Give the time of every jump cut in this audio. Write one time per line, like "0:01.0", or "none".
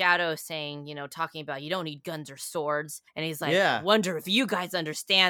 0:03.1